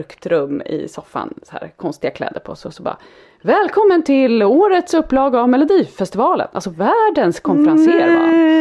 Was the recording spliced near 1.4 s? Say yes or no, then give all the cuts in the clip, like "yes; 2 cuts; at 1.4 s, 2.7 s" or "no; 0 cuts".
no; 0 cuts